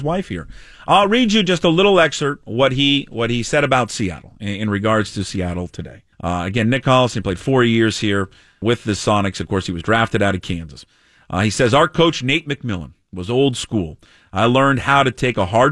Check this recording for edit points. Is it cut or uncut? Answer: cut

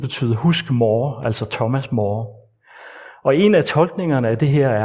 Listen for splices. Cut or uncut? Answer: uncut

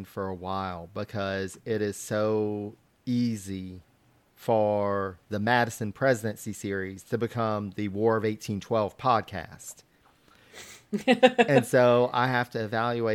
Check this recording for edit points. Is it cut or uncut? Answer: uncut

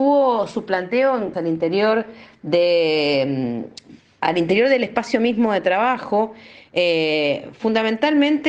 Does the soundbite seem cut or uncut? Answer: cut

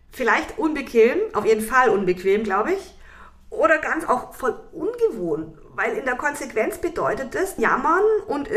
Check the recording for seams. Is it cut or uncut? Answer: cut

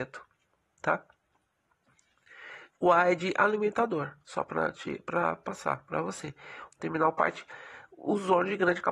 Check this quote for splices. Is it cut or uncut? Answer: cut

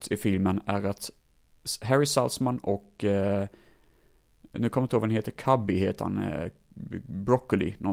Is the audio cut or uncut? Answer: uncut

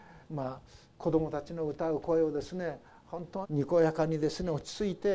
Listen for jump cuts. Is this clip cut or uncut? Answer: cut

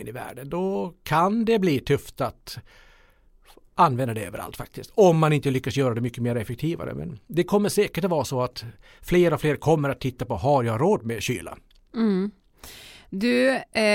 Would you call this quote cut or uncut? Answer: uncut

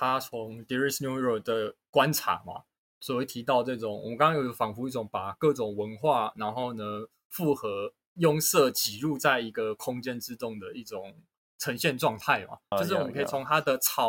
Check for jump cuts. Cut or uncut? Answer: cut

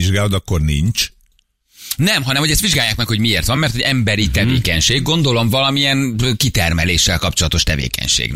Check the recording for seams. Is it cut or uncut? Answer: uncut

